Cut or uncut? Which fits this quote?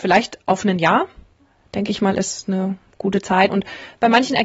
cut